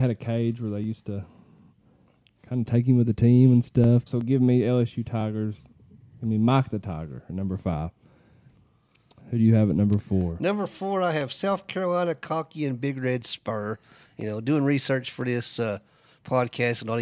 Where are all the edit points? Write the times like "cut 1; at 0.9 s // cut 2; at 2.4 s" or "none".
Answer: cut 1; at 4.1 s